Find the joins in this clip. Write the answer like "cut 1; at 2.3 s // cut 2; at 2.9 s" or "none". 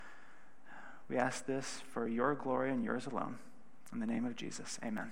none